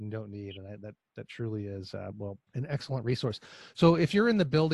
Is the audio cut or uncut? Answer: cut